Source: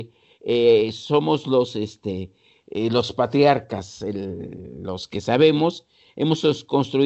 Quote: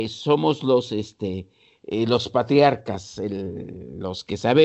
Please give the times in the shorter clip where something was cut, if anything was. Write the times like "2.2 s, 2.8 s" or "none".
none